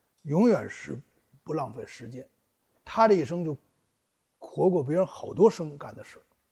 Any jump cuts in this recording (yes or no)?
no